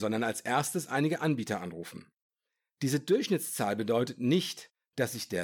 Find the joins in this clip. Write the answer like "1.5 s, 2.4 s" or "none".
none